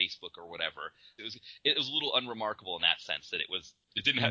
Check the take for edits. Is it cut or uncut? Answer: cut